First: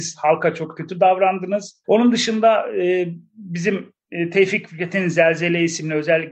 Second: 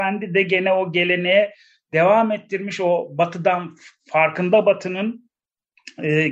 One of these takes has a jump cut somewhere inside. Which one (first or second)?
first